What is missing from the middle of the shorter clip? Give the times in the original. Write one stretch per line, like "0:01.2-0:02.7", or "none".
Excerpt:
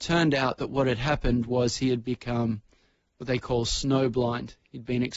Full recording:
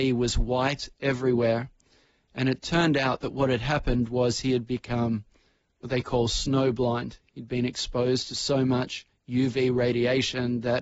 none